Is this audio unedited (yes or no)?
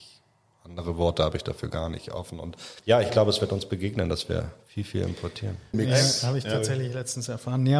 no